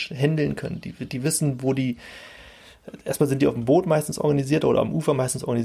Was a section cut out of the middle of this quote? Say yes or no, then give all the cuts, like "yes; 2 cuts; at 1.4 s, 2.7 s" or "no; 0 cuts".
no; 0 cuts